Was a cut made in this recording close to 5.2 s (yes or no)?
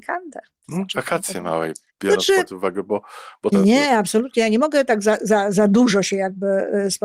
no